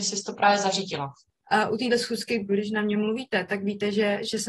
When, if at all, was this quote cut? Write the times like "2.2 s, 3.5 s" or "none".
1.4 s, 2.5 s

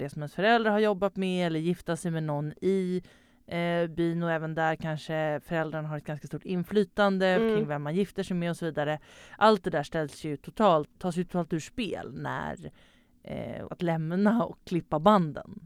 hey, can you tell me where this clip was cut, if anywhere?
11.0 s, 13.7 s

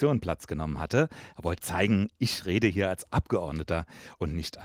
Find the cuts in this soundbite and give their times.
1.6 s

